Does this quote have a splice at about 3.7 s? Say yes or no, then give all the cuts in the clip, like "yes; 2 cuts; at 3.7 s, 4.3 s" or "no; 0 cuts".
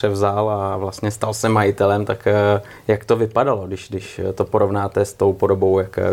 no; 0 cuts